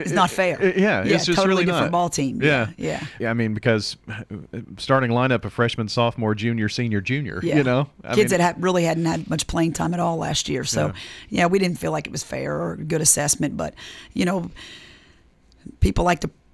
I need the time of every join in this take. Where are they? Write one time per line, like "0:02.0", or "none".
0:03.2